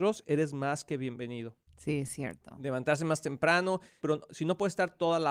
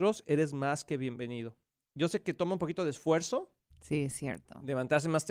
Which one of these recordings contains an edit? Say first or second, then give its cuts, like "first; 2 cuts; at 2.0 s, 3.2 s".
first; 2 cuts; at 1.7 s, 4.0 s